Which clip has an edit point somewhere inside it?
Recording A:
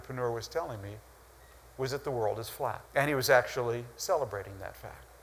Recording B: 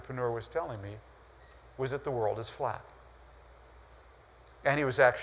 A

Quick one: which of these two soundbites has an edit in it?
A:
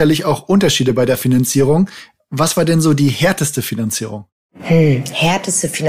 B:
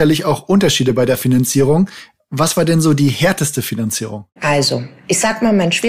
B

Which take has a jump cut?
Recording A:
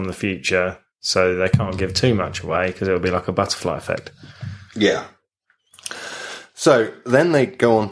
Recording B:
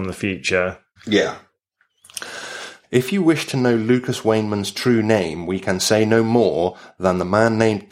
B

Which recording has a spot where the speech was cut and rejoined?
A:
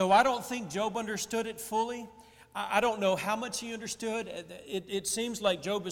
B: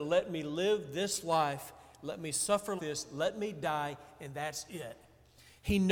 B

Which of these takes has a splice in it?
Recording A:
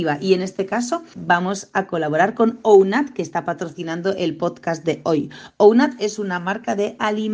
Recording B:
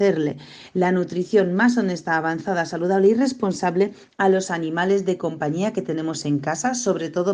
A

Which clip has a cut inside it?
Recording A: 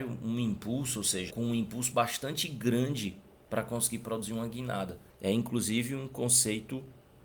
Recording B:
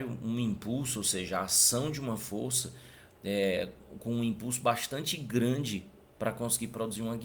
A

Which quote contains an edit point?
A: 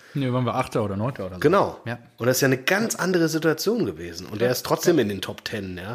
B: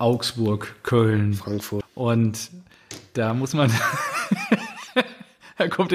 B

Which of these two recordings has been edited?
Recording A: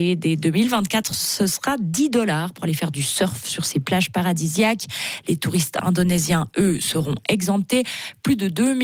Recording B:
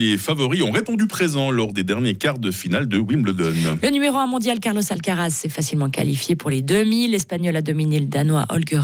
A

